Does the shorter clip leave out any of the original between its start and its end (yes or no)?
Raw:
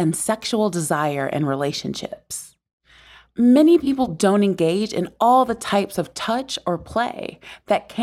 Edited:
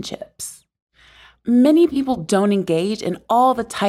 no